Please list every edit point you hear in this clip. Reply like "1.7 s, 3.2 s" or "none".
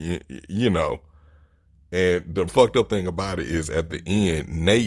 2.5 s